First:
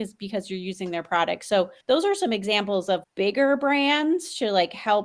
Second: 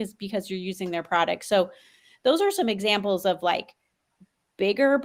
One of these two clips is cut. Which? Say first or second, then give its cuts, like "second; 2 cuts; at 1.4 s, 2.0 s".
first; 2 cuts; at 1.8 s, 3.0 s